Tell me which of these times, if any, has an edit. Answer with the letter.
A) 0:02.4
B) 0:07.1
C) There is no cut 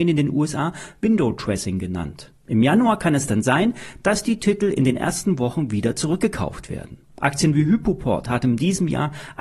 B